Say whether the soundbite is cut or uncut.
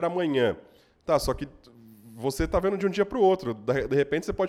uncut